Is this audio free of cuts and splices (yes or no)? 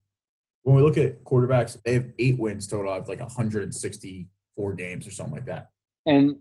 no